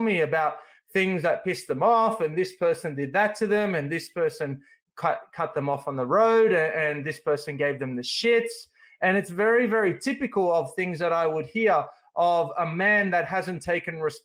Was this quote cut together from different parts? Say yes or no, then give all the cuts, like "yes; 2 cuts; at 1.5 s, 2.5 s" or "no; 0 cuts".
no; 0 cuts